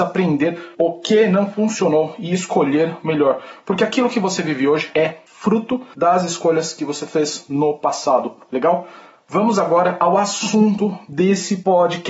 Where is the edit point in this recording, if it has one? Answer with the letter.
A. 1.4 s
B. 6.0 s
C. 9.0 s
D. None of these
D